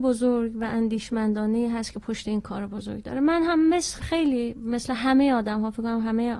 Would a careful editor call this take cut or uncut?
cut